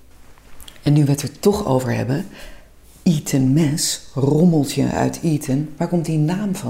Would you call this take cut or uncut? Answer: uncut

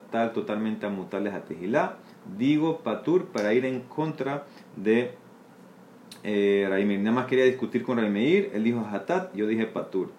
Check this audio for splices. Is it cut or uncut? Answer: uncut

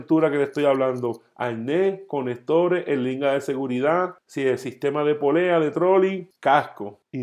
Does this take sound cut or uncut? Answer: uncut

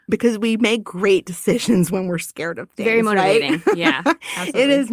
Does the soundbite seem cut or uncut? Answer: uncut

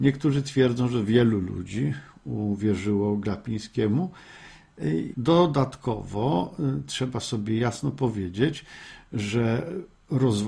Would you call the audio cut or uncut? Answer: cut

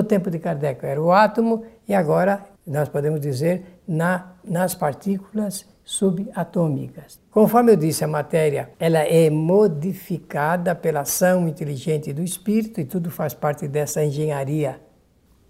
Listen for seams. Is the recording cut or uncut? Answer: cut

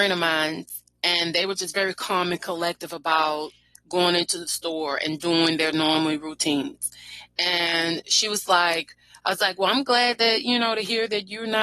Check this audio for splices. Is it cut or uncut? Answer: uncut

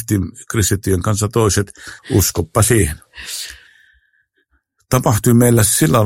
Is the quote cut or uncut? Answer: cut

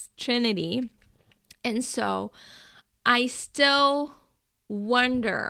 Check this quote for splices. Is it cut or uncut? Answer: uncut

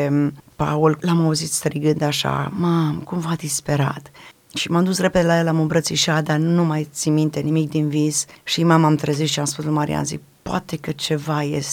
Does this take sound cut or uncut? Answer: cut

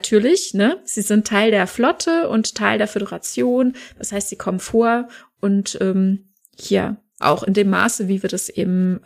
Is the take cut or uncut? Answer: cut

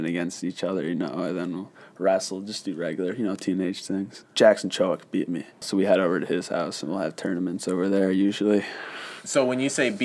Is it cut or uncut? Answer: cut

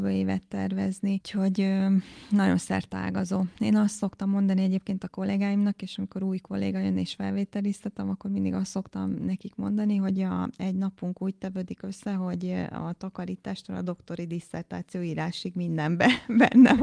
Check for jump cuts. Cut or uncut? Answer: uncut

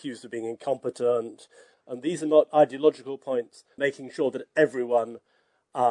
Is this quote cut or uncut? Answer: cut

